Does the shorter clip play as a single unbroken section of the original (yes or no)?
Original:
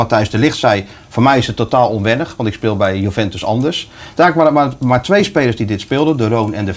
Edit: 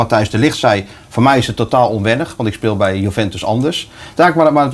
yes